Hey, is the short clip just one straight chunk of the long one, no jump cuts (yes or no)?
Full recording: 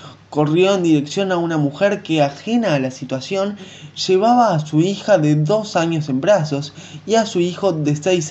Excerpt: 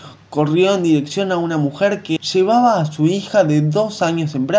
no